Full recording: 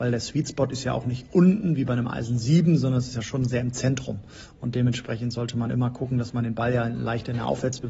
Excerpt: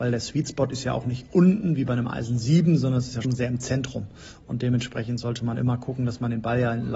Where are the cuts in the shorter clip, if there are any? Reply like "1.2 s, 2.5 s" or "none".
3.2 s